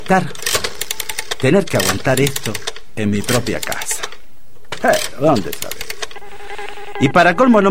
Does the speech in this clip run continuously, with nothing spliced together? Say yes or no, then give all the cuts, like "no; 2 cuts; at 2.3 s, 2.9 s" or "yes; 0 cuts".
yes; 0 cuts